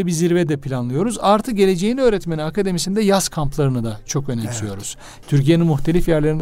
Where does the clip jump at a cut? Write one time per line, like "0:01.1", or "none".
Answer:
0:05.2